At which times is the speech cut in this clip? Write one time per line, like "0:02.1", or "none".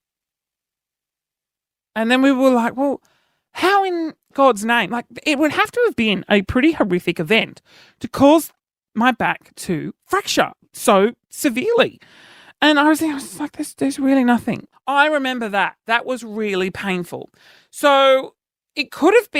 0:14.7